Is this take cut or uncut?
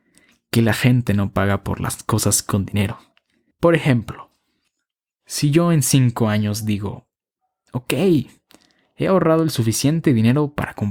cut